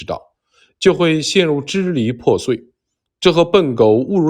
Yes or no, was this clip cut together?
no